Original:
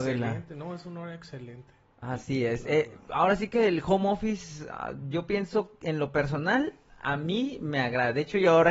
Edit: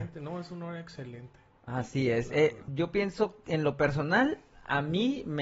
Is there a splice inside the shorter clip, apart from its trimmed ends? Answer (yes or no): yes